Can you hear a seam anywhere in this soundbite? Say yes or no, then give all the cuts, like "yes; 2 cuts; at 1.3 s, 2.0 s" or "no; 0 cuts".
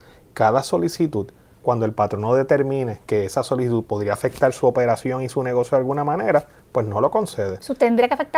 no; 0 cuts